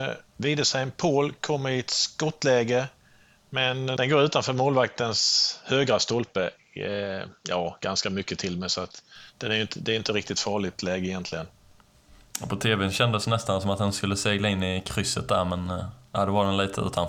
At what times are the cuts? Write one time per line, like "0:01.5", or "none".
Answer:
none